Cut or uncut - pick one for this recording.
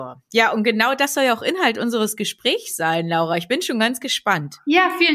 uncut